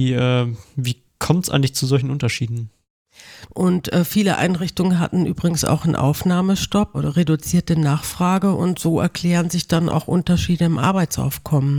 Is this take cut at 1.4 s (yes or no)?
no